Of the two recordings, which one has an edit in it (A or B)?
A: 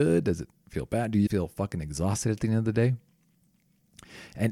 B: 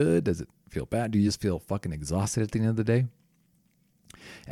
A